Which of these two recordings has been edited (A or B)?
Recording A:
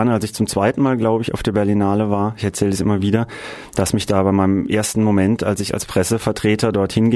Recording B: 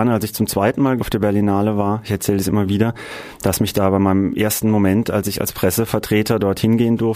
B